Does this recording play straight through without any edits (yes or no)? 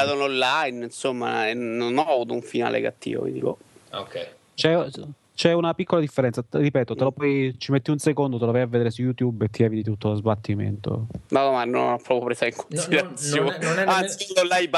yes